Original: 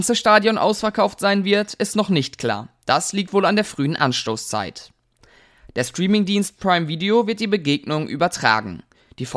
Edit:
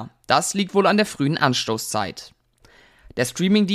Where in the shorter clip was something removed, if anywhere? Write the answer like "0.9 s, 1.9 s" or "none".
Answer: none